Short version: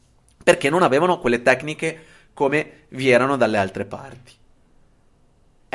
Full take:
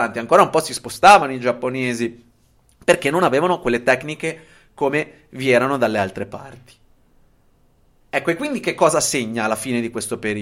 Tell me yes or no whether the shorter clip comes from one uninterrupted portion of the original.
yes